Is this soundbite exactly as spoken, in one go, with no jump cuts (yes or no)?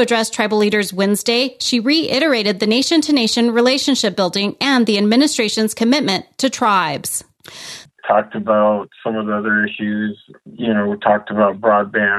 no